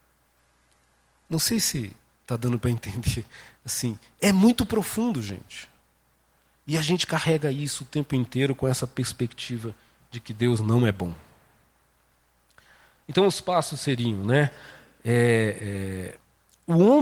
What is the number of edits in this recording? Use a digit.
0